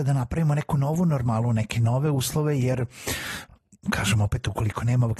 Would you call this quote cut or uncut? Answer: uncut